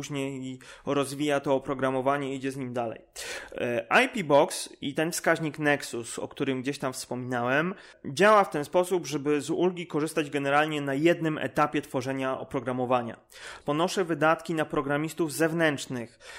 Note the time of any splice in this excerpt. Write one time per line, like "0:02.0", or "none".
0:13.6